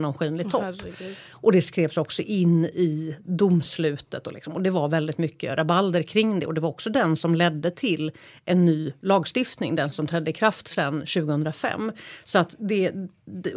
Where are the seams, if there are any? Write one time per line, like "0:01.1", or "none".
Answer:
none